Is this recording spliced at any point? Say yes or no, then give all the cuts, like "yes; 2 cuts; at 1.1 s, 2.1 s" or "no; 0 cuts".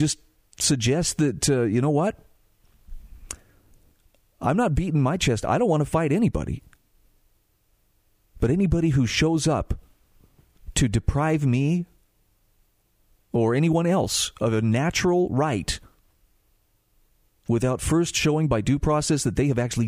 no; 0 cuts